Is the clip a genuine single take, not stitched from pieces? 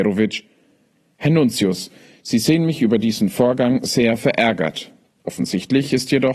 no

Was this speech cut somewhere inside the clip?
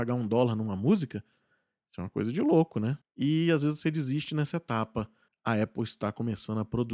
yes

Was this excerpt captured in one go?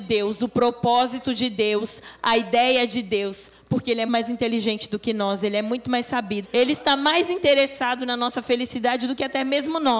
no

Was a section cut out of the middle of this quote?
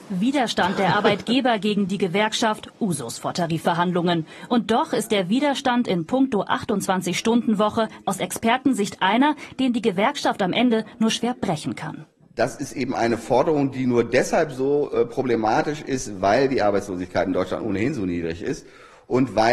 no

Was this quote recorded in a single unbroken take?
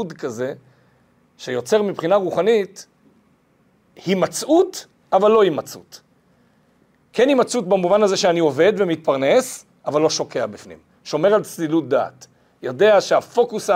yes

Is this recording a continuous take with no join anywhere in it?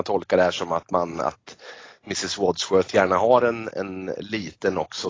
yes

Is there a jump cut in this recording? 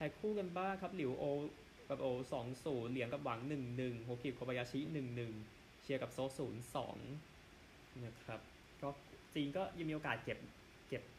no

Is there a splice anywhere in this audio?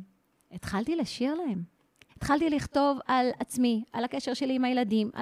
yes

